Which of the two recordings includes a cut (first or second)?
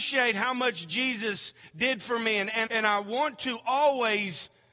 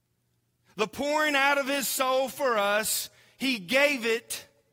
first